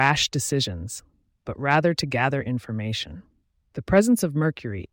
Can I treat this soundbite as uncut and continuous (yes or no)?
yes